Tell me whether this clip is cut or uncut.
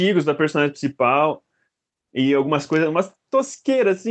uncut